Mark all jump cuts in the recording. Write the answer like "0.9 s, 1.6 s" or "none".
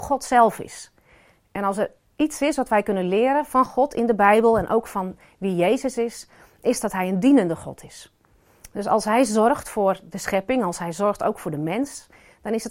none